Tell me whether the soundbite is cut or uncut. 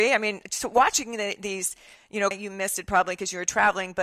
cut